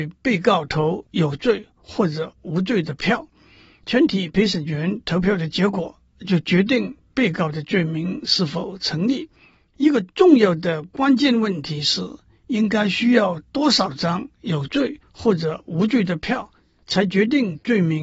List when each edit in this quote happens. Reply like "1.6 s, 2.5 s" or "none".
none